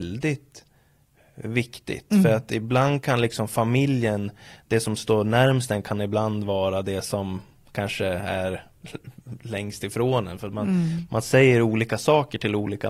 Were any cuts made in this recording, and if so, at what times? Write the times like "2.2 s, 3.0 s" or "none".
none